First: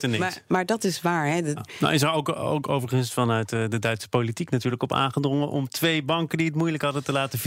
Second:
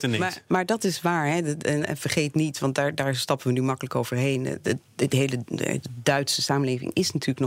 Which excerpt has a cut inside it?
first; 1 cut; at 1.6 s

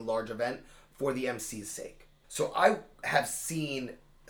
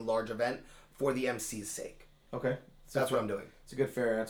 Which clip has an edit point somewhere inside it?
first; 1 cut; at 2.2 s

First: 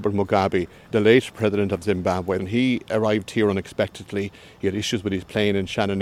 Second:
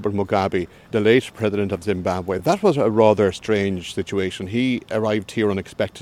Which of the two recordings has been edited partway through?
first; 1 cut; at 2.4 s

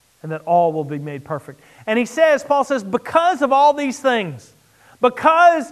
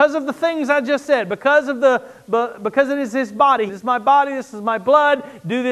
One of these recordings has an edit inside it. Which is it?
second; 1 cut; at 3.7 s

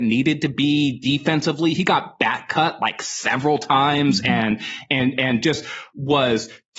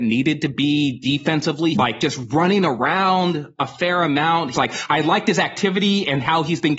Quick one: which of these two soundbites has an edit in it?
second; 2 cuts; at 1.7 s, 4.5 s

